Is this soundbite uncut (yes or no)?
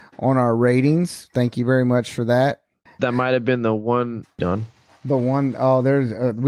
no